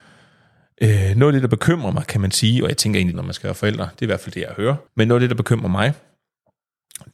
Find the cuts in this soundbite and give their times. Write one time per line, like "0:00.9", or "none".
0:03.1
0:04.9